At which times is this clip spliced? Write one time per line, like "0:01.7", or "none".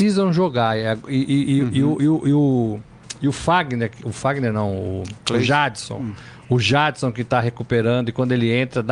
none